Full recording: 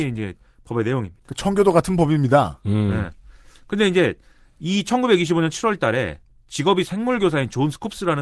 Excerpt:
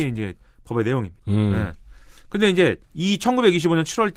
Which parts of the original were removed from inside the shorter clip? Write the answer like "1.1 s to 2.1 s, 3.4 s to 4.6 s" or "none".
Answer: 1.2 s to 2.6 s, 4.2 s to 4.5 s

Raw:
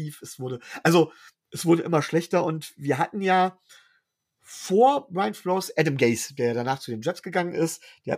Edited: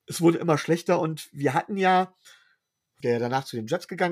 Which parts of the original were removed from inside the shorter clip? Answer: 4.4 s to 6.3 s

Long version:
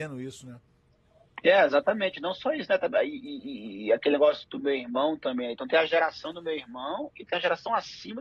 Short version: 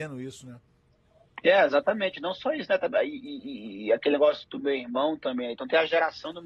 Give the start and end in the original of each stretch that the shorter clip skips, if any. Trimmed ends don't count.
none

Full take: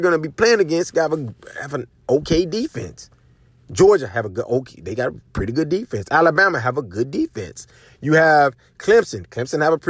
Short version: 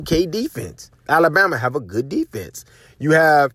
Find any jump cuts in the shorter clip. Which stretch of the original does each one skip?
3.3 s to 6.1 s

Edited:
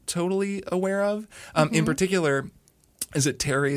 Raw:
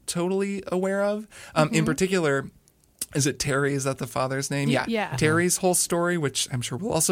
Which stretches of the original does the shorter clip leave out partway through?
none

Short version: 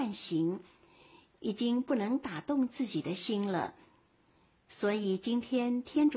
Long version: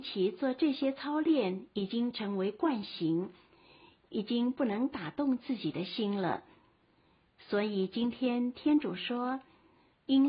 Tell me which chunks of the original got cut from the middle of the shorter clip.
none

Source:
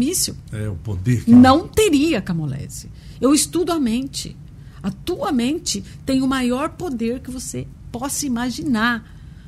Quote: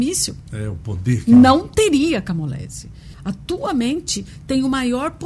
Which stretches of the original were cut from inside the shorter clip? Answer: 3.1 s to 4.7 s

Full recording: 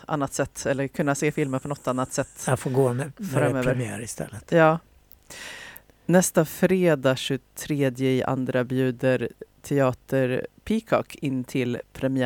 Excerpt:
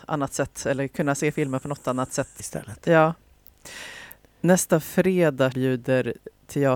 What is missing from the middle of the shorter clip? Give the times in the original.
2.4 s to 4.0 s, 7.2 s to 8.7 s

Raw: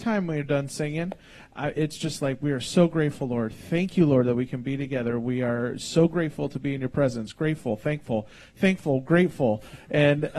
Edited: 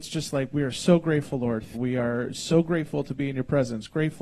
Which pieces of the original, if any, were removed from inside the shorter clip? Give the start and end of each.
3.6 s to 5.2 s

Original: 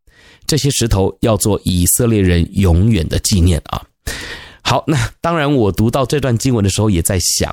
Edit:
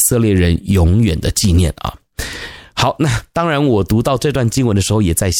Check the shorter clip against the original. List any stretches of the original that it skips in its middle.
none

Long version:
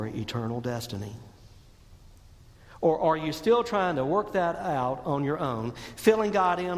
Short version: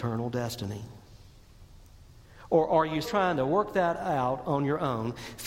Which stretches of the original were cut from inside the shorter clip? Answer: 3.3 s to 3.6 s

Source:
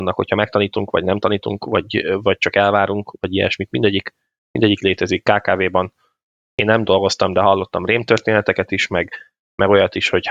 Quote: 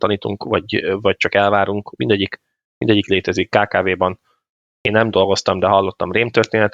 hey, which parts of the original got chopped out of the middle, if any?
3.2 s to 3.7 s

